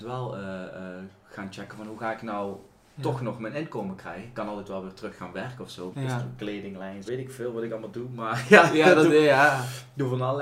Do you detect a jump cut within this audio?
yes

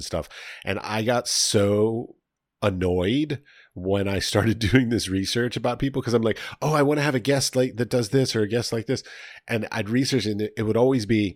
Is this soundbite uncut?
yes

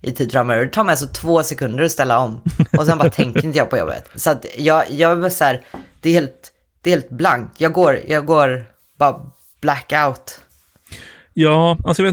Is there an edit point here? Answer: yes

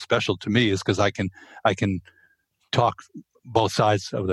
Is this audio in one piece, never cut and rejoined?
yes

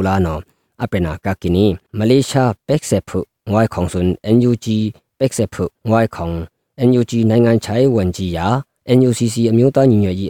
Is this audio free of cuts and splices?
no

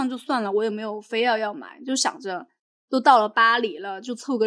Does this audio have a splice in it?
no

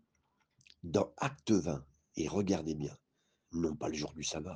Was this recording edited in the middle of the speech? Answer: yes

